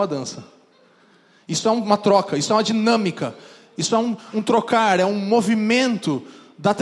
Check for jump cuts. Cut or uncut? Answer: uncut